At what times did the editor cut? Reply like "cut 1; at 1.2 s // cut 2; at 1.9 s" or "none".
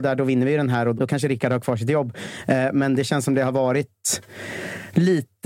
cut 1; at 1.0 s